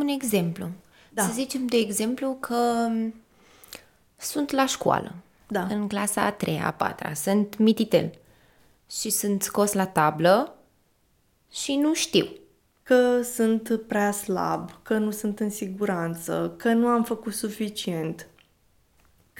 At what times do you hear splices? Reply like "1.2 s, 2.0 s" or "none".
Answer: 12.8 s